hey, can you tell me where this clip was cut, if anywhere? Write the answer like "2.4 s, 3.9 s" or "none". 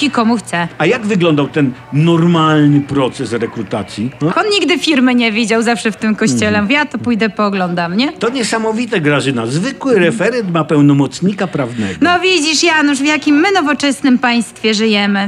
4.3 s